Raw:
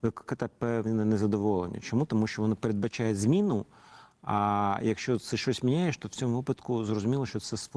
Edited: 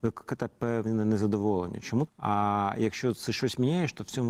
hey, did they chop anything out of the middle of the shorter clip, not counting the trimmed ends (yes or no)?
yes